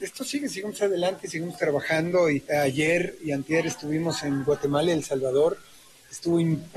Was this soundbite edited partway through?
yes; 1 cut; at 2.5 s

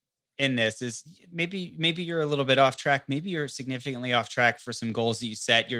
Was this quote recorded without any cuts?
yes; 0 cuts

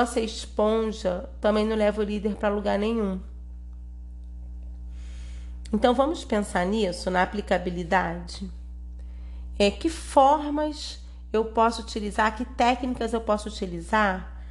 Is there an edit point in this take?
no; 0 cuts

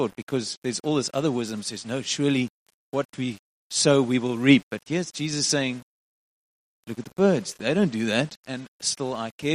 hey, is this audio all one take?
yes; 0 cuts

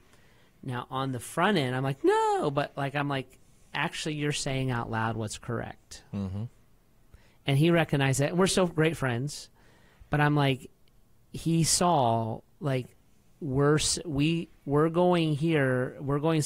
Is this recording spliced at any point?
no; 0 cuts

